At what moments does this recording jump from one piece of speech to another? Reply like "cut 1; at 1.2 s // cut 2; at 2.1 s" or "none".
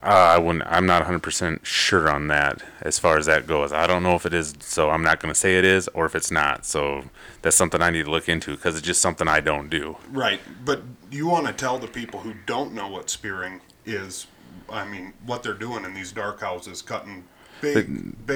none

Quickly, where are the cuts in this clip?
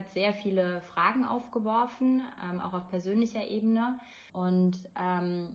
cut 1; at 4.3 s

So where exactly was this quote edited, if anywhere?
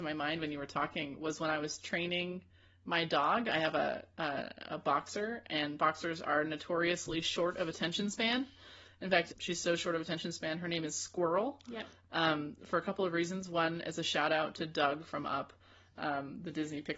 cut 1; at 9.3 s

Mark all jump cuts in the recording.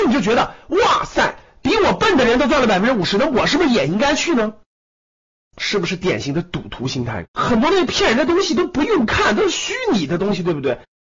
cut 1; at 7.2 s

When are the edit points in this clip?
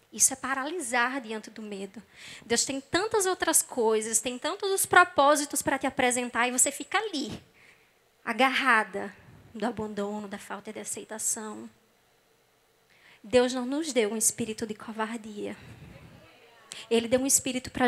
cut 1; at 9.5 s

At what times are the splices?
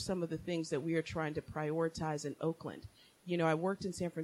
none

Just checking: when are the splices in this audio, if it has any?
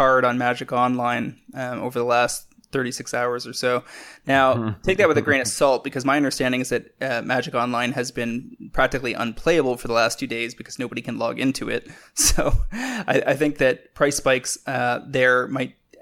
none

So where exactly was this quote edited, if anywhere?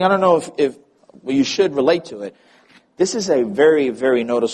cut 1; at 2.8 s

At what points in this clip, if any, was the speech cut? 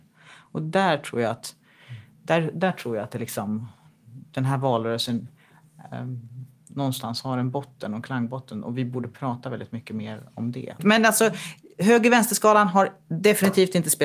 cut 1; at 10.8 s

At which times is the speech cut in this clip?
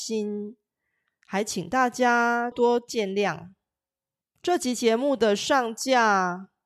cut 1; at 2.5 s // cut 2; at 4.2 s

